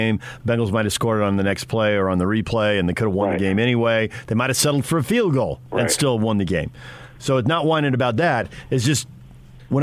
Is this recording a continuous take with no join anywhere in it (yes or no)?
yes